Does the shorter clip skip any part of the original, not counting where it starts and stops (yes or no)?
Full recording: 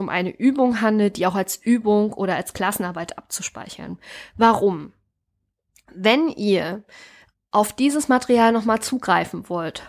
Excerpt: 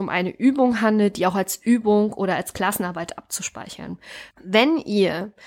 yes